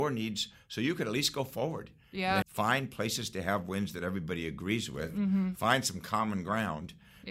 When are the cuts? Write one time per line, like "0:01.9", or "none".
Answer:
0:02.4